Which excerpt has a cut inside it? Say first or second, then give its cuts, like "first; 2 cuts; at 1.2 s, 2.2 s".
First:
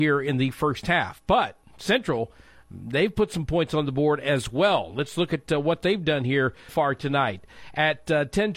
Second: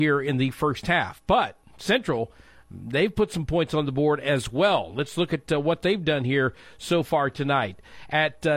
first; 1 cut; at 6.7 s